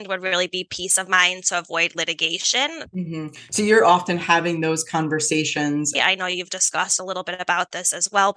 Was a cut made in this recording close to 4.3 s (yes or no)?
no